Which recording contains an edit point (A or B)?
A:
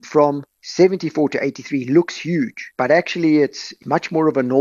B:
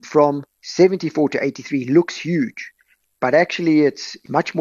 A